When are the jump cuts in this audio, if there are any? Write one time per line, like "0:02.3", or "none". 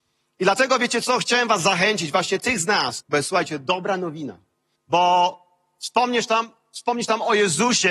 0:03.0
0:04.8